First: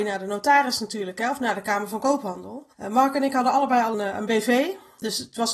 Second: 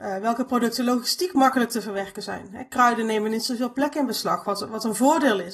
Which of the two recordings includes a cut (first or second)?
first